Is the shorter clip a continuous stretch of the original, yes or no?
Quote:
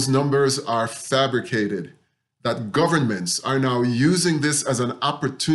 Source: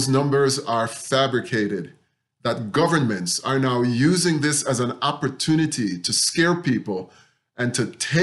yes